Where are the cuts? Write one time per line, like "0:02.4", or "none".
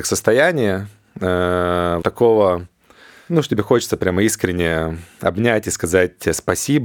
0:02.0